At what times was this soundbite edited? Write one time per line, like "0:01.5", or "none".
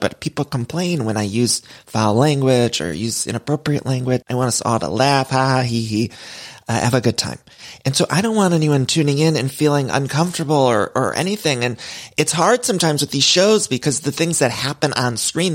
0:04.2